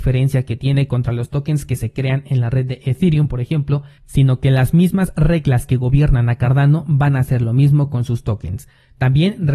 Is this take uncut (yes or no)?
no